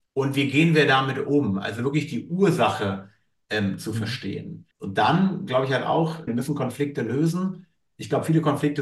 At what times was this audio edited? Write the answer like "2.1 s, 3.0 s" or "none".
4.7 s, 6.3 s